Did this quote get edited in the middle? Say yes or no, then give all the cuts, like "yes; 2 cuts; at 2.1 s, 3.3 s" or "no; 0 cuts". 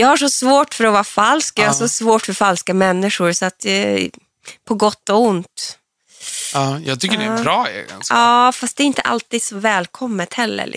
no; 0 cuts